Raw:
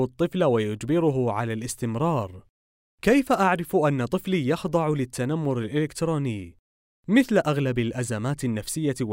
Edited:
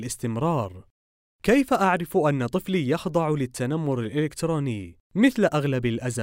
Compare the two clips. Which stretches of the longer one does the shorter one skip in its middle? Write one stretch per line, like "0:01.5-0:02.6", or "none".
0:06.6-0:07.0